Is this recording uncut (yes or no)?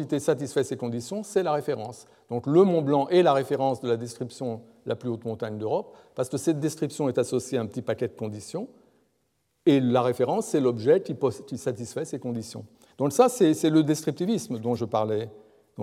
yes